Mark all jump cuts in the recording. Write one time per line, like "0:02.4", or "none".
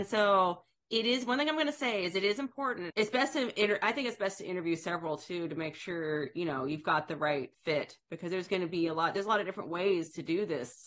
0:02.9
0:07.5